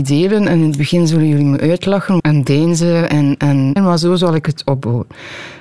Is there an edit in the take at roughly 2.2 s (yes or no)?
yes